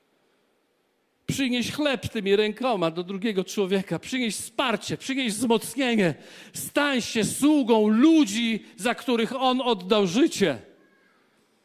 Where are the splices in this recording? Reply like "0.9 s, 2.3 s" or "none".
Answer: none